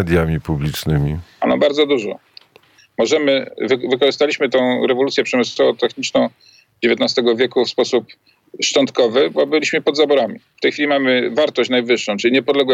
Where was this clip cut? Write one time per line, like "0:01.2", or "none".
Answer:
0:02.8